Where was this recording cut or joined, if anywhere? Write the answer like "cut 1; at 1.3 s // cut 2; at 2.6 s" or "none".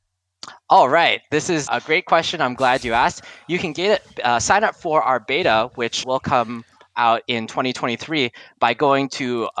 cut 1; at 1.7 s // cut 2; at 6.0 s